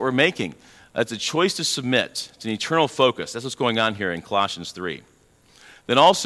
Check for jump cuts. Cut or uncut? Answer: uncut